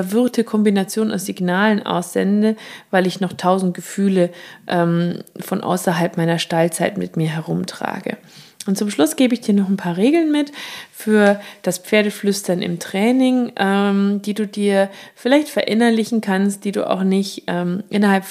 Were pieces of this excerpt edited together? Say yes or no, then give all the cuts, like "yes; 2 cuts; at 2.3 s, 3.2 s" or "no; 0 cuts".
no; 0 cuts